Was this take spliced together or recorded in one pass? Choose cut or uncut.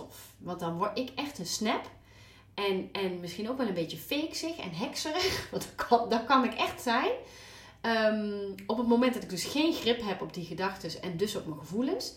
uncut